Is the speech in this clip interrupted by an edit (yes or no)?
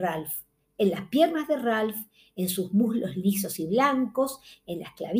no